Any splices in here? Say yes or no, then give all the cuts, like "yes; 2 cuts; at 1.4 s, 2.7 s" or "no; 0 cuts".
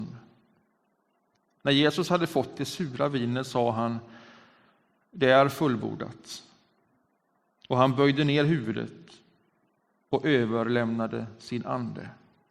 no; 0 cuts